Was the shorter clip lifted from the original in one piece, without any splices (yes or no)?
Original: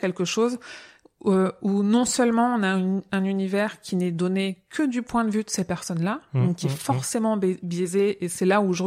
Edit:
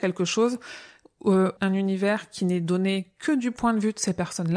no